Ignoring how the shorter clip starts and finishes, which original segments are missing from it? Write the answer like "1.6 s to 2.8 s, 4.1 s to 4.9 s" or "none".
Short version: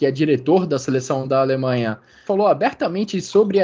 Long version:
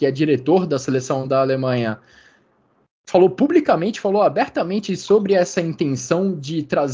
2.3 s to 4.0 s